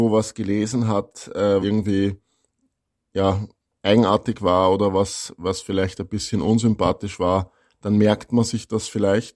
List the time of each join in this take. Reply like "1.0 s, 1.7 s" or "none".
1.6 s